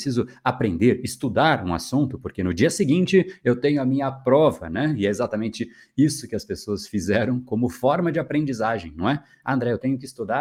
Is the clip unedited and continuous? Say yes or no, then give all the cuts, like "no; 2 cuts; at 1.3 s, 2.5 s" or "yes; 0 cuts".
yes; 0 cuts